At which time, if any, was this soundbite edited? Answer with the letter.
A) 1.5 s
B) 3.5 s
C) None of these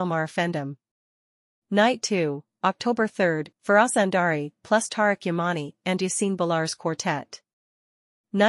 B